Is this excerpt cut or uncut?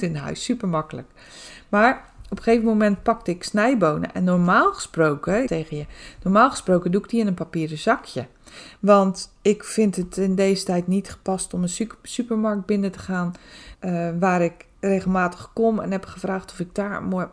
cut